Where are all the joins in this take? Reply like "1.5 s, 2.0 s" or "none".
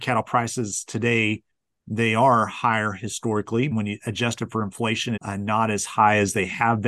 3.7 s, 5.2 s